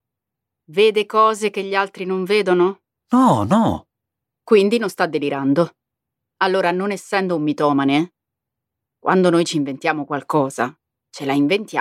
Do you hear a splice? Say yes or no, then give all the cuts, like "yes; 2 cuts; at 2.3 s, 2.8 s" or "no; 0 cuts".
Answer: no; 0 cuts